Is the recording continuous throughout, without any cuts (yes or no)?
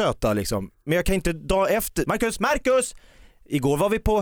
no